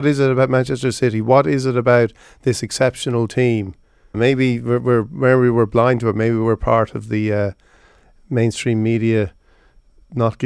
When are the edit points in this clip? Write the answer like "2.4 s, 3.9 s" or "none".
4.1 s